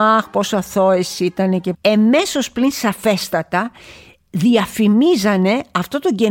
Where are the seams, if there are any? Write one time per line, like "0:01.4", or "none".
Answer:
0:01.7